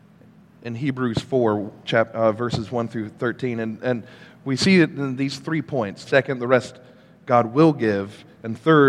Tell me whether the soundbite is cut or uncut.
cut